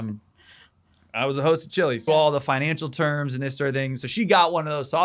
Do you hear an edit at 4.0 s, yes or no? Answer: no